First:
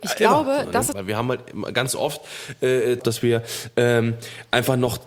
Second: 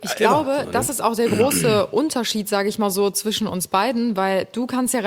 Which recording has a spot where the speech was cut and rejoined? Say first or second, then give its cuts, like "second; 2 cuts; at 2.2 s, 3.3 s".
first; 2 cuts; at 0.9 s, 3.0 s